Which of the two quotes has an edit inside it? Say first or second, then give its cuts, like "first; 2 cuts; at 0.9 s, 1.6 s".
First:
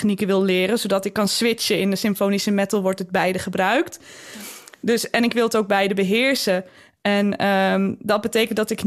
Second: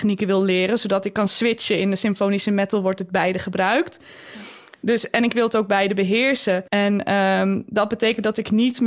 second; 1 cut; at 6.7 s